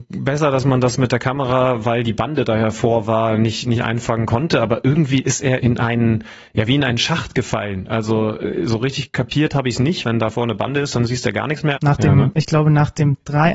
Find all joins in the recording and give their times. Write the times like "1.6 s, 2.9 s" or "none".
5.6 s, 10.0 s, 11.8 s